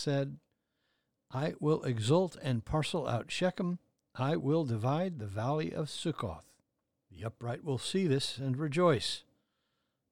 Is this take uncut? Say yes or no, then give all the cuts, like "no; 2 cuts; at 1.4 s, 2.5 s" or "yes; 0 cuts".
no; 1 cut; at 7.0 s